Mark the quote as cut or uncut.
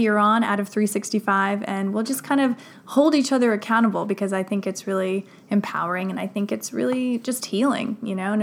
uncut